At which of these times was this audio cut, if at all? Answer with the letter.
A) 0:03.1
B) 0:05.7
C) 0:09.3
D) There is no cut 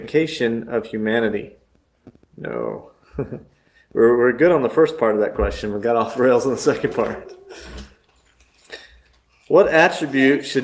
D